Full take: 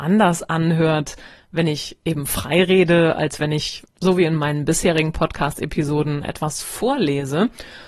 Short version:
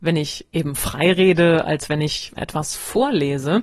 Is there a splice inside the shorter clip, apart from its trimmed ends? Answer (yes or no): yes